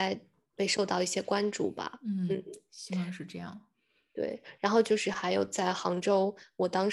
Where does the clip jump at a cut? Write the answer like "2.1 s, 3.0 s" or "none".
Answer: none